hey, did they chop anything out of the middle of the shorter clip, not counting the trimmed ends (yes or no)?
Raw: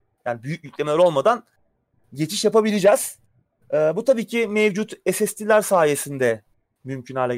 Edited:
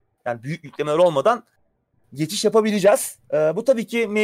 yes